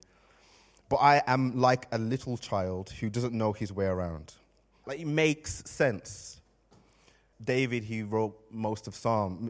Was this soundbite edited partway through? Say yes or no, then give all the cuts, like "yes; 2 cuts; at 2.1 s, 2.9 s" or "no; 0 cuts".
yes; 2 cuts; at 4.8 s, 7.3 s